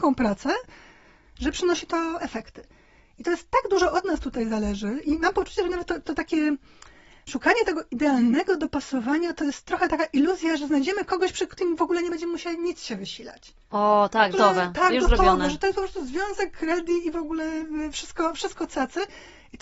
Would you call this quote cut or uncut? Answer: cut